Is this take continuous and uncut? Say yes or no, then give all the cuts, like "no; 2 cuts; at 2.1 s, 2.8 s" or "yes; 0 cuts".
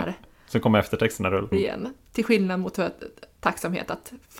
no; 1 cut; at 1.5 s